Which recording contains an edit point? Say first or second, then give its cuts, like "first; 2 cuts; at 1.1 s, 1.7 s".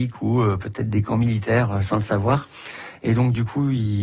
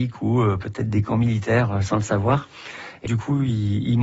second; 1 cut; at 3.1 s